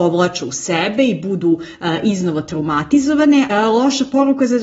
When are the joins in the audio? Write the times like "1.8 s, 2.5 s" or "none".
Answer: 3.5 s